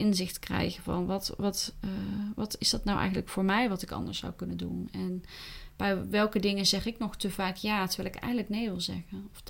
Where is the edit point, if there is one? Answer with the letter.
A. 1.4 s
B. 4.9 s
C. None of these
C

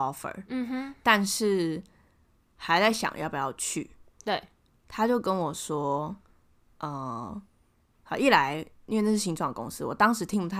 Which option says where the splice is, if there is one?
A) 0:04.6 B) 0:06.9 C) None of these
C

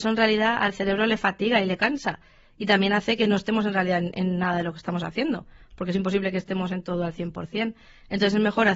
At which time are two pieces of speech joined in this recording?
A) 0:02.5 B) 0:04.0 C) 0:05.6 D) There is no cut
D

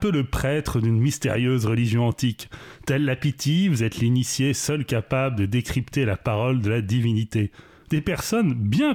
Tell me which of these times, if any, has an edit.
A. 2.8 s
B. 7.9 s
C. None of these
B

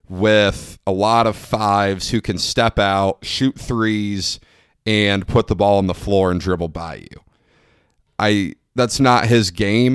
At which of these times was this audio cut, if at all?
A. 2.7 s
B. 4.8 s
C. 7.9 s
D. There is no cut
D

